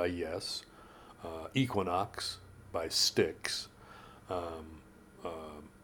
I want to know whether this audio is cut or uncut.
uncut